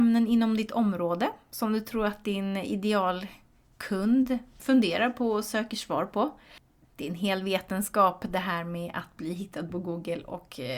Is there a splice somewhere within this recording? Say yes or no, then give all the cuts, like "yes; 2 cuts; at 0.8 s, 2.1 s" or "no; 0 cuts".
yes; 2 cuts; at 4.6 s, 6.8 s